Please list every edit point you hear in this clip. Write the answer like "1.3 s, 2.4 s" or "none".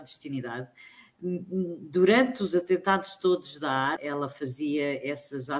4.0 s